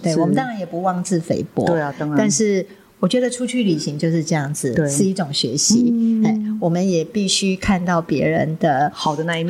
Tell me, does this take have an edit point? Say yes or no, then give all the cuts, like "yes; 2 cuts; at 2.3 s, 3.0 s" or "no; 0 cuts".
no; 0 cuts